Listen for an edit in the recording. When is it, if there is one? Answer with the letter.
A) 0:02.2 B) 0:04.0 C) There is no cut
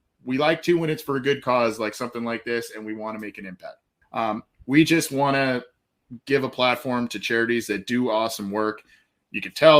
B